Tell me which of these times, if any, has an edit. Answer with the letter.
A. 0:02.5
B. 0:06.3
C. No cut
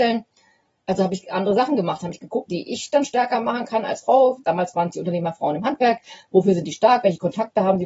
A